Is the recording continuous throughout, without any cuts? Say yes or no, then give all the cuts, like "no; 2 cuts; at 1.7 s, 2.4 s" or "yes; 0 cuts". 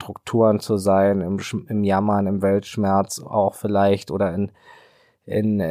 yes; 0 cuts